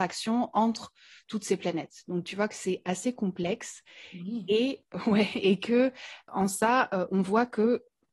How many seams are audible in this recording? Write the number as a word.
zero